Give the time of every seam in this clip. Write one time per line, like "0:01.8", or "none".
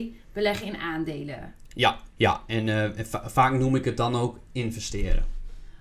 0:02.1